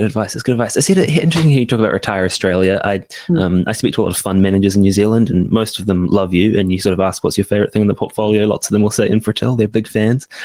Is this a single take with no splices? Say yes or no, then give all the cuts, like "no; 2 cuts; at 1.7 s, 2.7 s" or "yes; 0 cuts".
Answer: yes; 0 cuts